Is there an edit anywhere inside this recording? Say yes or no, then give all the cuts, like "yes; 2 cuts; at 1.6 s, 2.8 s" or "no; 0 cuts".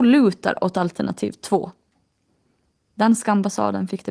no; 0 cuts